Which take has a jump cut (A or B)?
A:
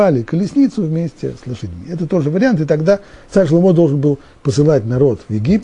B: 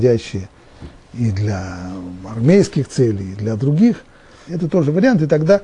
B